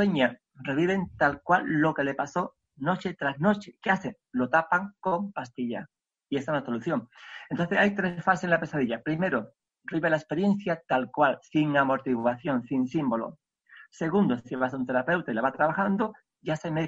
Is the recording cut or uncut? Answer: uncut